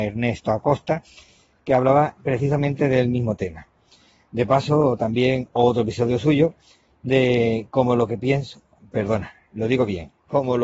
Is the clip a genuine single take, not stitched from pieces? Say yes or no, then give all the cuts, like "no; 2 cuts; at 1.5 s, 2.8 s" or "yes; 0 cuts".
yes; 0 cuts